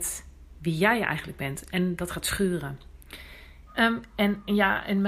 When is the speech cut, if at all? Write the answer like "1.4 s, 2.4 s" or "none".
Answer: 3.7 s